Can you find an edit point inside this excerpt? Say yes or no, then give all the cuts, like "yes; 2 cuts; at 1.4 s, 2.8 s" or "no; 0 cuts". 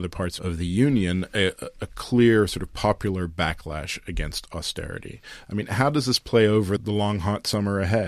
yes; 1 cut; at 5.4 s